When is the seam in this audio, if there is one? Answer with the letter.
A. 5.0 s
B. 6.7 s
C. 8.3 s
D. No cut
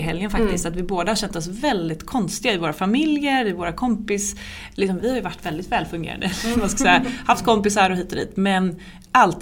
A